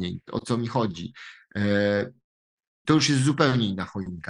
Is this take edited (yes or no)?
yes